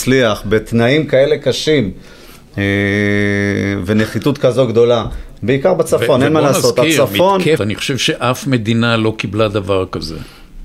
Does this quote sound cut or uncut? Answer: cut